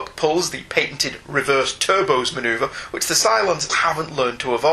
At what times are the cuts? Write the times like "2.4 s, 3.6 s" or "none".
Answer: 3.7 s